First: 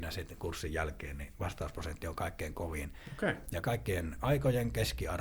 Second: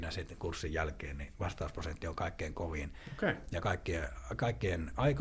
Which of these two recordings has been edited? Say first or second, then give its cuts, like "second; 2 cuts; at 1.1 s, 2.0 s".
first; 1 cut; at 3.6 s